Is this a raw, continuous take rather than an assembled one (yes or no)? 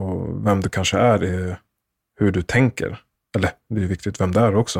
yes